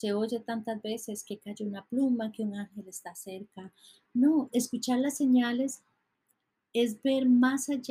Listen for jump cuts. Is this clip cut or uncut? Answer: cut